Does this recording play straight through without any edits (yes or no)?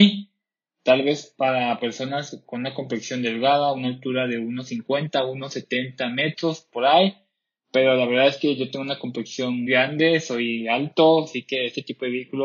no